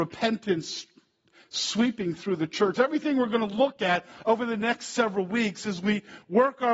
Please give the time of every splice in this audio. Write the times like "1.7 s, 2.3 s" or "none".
2.7 s